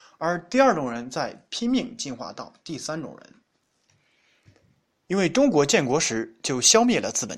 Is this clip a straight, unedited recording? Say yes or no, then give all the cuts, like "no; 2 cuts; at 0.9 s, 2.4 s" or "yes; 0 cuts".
yes; 0 cuts